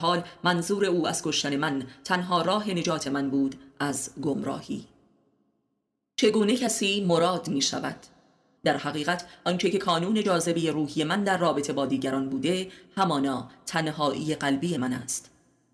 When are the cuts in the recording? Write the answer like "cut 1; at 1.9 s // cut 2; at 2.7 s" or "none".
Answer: cut 1; at 8.6 s